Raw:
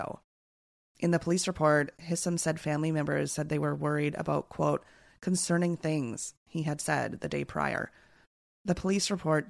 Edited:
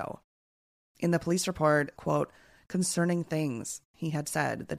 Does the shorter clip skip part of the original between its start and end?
yes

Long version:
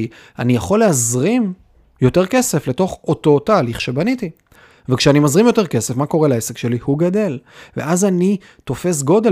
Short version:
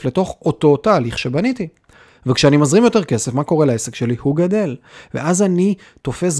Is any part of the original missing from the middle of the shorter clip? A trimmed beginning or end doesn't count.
no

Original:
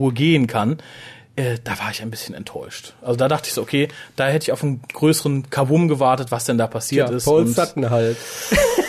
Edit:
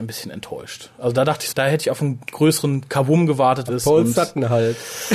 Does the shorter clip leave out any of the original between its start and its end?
yes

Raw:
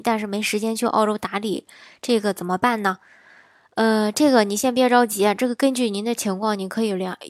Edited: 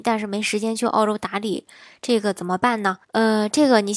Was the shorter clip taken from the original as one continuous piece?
no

